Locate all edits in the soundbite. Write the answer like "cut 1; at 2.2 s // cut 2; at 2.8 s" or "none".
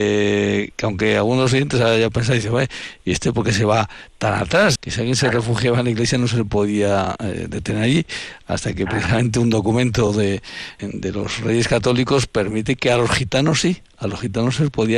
cut 1; at 4.8 s // cut 2; at 10.8 s